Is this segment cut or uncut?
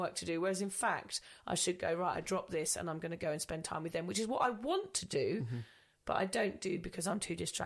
uncut